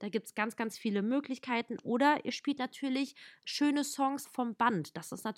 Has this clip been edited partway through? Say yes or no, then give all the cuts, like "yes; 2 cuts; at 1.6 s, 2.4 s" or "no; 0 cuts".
yes; 1 cut; at 4.2 s